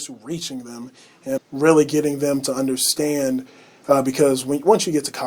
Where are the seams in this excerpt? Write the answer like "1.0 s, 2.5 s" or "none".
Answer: 1.4 s